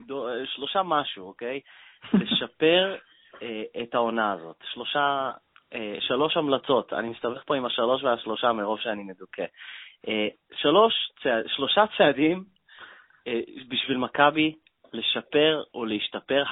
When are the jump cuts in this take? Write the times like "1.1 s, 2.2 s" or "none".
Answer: none